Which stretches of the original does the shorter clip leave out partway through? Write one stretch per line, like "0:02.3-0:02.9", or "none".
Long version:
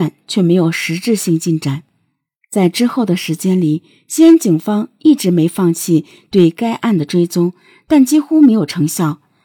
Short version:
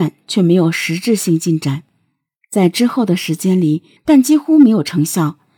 0:04.0-0:07.8